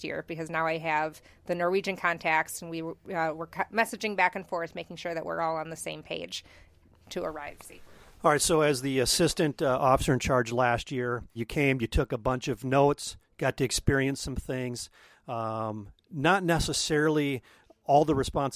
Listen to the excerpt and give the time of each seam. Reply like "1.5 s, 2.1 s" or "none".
11.4 s

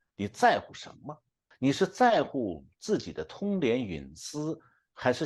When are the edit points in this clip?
1.5 s

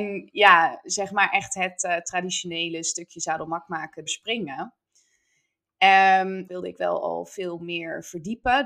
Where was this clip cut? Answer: 4.1 s, 6.5 s

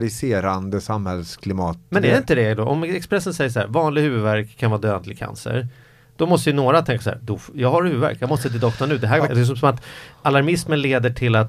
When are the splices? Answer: 9.3 s

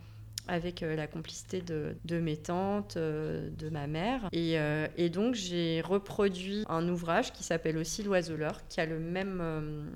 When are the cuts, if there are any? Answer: 2.0 s, 4.3 s, 6.6 s

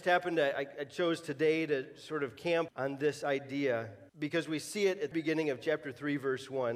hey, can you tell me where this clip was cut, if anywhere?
2.7 s, 4.1 s, 5.1 s

